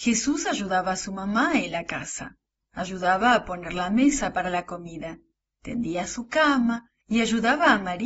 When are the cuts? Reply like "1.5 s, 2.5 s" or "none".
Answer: 5.5 s